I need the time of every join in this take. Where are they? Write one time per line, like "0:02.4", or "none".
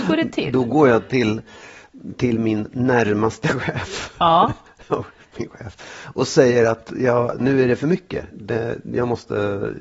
none